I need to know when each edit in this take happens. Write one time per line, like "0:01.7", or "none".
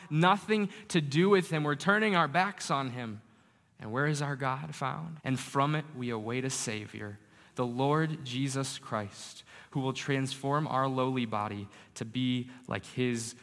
0:05.2